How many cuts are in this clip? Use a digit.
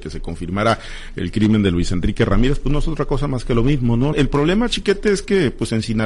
1